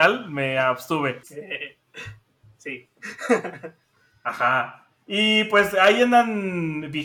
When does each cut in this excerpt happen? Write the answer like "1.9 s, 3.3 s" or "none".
1.2 s